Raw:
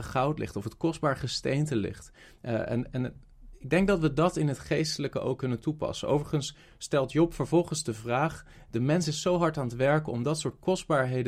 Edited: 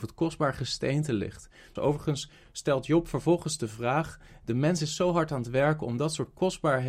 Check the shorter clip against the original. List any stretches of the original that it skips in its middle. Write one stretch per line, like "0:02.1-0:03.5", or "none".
0:02.4-0:06.0